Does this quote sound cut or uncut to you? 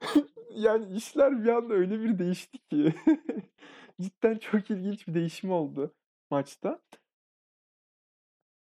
uncut